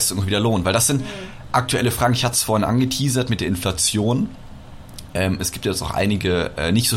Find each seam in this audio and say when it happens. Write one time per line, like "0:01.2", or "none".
none